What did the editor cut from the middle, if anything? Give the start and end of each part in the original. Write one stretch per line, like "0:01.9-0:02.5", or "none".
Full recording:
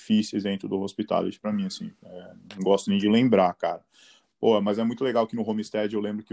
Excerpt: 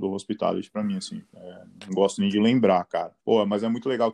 0:03.9-0:04.3